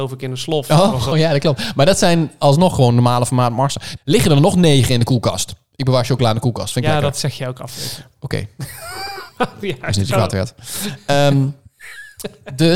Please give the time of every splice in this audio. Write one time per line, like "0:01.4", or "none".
0:01.1
0:04.0